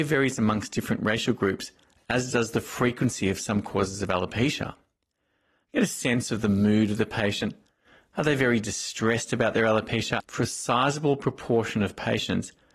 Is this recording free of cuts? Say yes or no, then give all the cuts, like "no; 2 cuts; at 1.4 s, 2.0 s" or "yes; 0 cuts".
no; 1 cut; at 10.2 s